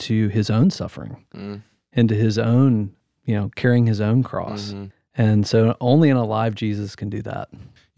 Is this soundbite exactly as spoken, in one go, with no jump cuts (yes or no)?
yes